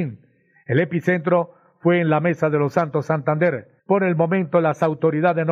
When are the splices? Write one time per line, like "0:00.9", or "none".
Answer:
0:03.8